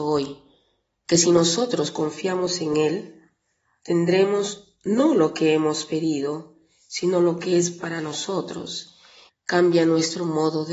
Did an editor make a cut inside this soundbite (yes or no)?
yes